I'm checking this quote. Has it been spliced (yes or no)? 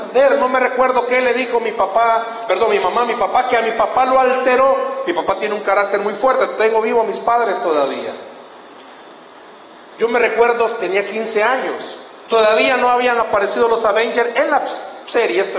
yes